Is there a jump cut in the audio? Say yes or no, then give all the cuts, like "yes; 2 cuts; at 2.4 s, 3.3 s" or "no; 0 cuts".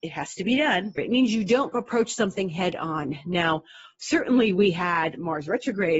yes; 1 cut; at 1.0 s